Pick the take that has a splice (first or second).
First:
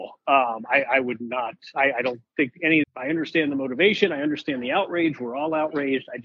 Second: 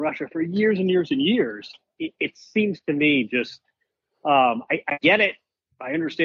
first